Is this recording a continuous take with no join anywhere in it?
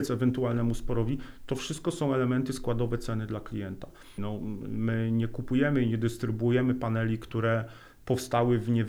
no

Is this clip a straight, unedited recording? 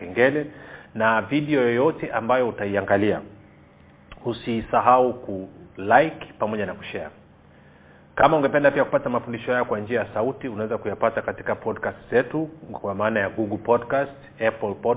yes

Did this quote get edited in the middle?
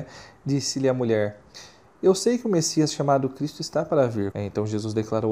yes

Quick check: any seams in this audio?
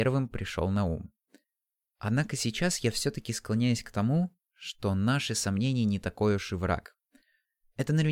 no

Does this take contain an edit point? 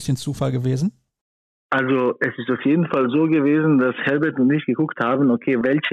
no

